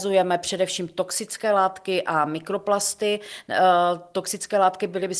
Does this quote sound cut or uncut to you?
uncut